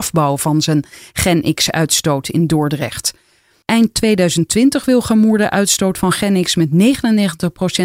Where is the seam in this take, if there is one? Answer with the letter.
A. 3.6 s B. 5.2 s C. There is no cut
A